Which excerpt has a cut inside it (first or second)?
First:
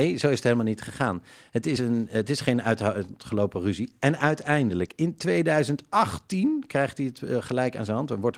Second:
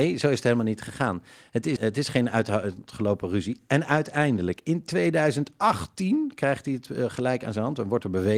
second